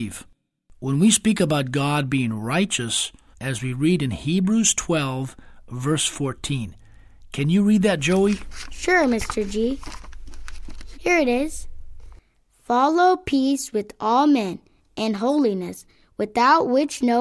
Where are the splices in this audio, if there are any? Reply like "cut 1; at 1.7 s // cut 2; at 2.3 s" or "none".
cut 1; at 3.3 s // cut 2; at 10.9 s